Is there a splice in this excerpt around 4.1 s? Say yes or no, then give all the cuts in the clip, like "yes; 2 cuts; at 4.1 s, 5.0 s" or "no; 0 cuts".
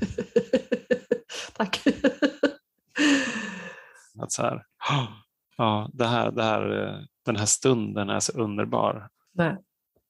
yes; 2 cuts; at 4.1 s, 9.1 s